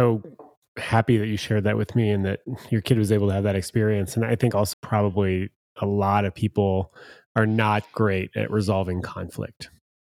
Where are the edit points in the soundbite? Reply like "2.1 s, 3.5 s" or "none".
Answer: 4.7 s